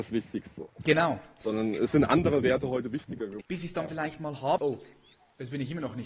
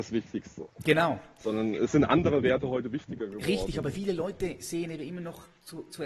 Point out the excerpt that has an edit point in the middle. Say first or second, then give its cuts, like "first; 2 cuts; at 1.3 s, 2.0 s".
first; 2 cuts; at 3.4 s, 4.6 s